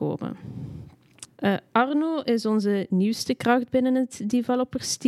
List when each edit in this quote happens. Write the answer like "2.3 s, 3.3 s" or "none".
1.3 s